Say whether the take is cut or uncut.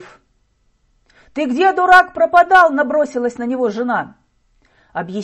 uncut